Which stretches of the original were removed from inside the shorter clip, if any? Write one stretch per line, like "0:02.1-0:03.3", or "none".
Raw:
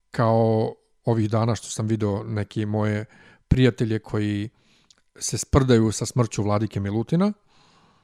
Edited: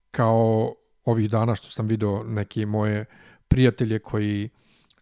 none